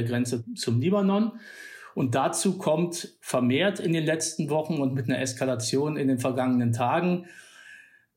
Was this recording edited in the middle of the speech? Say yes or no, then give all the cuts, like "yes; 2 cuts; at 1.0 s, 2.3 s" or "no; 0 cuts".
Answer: no; 0 cuts